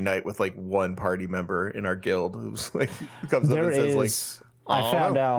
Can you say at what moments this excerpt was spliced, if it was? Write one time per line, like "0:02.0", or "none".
none